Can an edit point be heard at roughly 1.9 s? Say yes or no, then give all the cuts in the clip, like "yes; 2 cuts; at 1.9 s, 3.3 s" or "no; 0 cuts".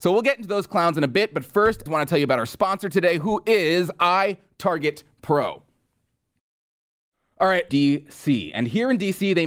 yes; 2 cuts; at 1.9 s, 7.7 s